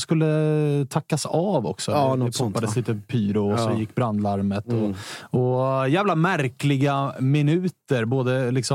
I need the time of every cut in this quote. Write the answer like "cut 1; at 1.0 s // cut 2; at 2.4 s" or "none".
none